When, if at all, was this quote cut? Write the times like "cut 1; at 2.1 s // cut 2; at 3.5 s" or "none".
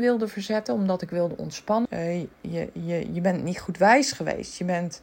cut 1; at 1.9 s